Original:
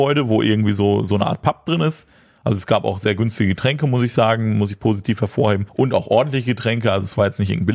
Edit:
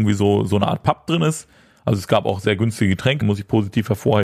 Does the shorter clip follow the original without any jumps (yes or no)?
no